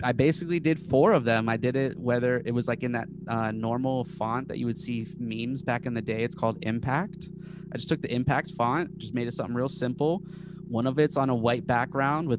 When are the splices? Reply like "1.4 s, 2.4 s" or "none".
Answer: none